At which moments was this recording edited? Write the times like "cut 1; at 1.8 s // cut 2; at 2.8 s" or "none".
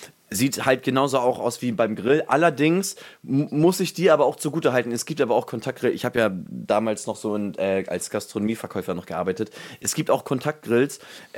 none